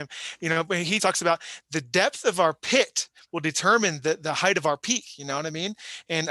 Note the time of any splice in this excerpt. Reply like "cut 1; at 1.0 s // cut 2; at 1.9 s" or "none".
cut 1; at 1.0 s